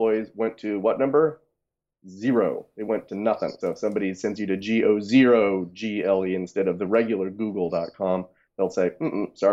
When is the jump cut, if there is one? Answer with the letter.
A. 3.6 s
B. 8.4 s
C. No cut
A